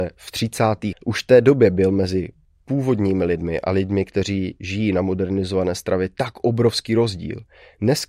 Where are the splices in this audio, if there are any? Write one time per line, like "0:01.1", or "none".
0:00.9